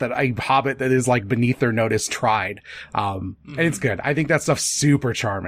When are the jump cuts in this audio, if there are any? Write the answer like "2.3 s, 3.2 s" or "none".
none